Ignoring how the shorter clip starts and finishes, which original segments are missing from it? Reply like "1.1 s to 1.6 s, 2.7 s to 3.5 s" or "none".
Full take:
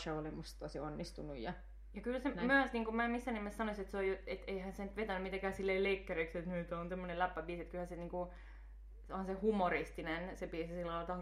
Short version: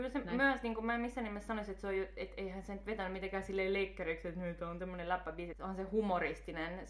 7.6 s to 9.0 s